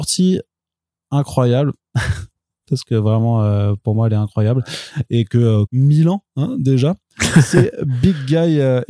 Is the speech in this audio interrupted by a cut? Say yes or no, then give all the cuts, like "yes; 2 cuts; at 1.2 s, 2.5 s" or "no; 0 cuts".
yes; 1 cut; at 5.7 s